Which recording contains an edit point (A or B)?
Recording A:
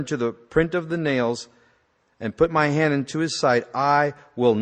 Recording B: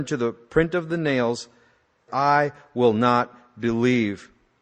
B